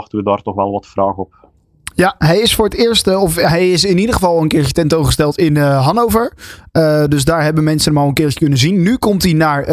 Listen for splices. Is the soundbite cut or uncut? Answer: uncut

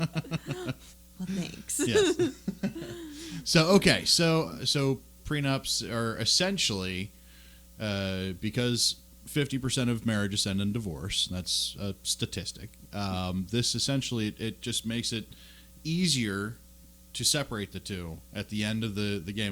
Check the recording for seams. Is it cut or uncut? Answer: uncut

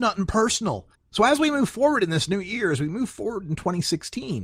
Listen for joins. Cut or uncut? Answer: cut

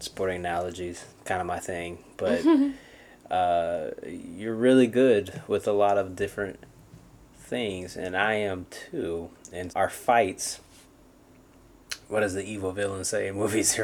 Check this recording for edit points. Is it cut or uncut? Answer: cut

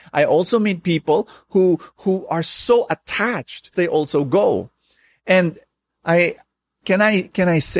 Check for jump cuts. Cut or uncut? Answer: cut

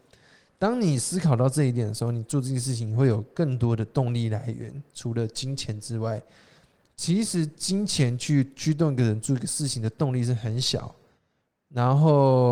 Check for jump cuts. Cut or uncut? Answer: uncut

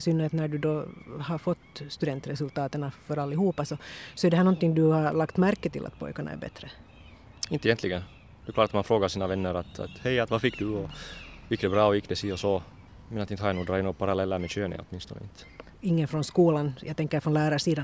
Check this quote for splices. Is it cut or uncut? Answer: uncut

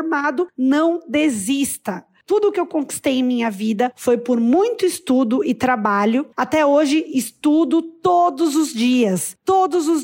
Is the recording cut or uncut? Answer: uncut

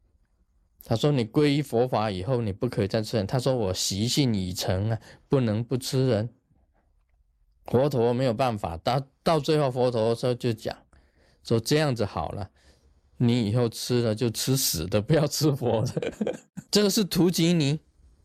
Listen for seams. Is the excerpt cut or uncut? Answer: cut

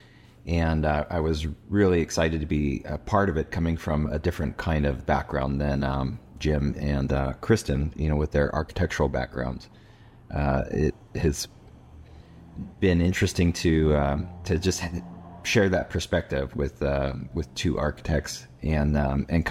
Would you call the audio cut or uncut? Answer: uncut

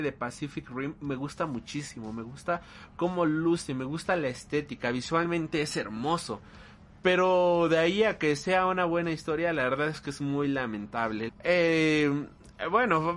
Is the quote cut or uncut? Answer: cut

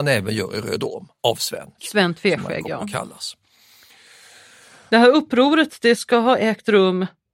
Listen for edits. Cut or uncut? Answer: cut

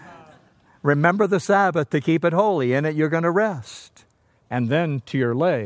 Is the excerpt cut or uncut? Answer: cut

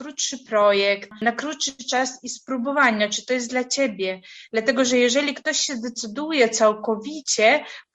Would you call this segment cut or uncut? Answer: uncut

